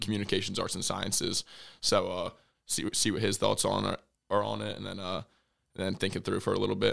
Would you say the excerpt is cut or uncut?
cut